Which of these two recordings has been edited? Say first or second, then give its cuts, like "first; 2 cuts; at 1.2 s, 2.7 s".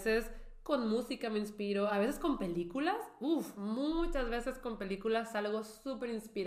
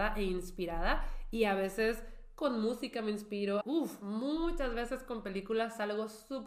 second; 1 cut; at 3.6 s